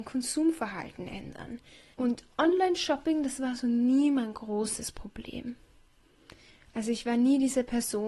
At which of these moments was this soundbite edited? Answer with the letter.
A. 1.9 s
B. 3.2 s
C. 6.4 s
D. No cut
A